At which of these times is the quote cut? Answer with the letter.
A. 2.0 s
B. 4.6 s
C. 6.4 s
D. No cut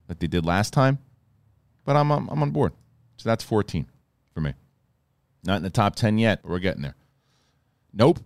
C